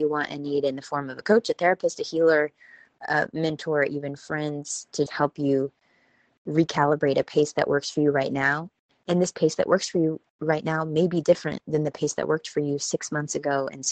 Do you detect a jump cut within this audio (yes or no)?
yes